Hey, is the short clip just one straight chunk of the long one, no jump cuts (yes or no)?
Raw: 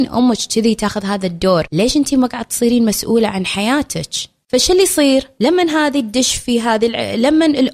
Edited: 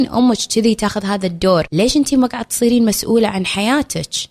yes